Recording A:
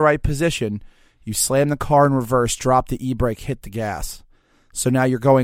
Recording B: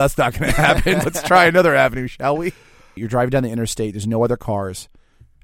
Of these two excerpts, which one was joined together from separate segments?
B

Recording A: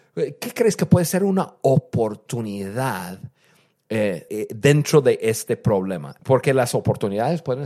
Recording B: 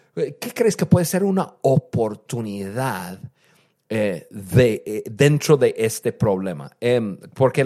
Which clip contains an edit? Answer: A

